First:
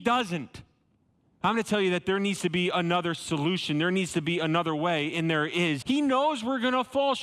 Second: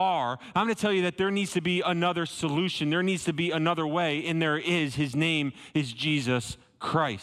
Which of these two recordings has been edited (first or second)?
first